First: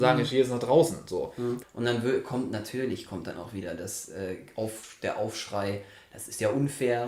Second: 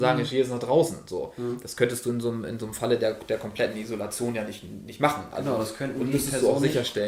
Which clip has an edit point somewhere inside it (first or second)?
first